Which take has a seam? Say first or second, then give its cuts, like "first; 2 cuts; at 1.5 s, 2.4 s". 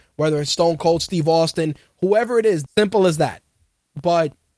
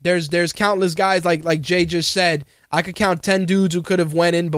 first; 1 cut; at 2.7 s